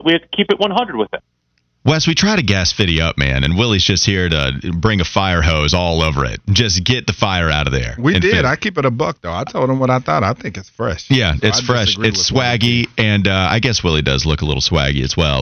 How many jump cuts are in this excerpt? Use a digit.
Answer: 0